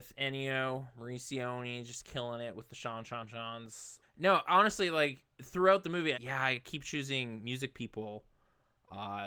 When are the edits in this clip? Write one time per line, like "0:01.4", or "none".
0:04.0
0:06.1